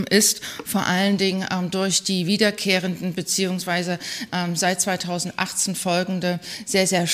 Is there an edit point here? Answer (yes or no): no